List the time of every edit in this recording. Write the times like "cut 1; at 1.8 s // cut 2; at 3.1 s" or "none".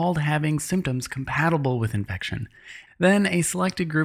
cut 1; at 2.9 s